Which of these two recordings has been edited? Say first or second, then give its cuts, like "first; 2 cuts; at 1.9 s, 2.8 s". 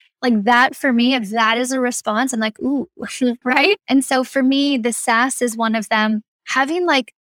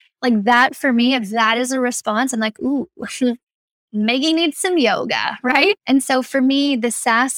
first; 1 cut; at 3.4 s